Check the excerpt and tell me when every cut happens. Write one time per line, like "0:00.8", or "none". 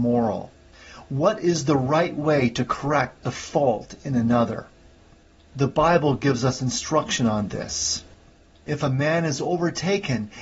none